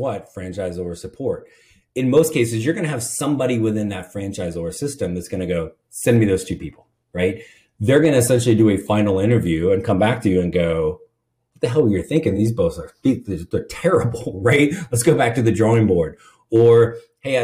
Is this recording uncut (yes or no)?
yes